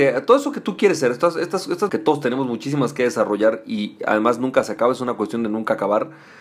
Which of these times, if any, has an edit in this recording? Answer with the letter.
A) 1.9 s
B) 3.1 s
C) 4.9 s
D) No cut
A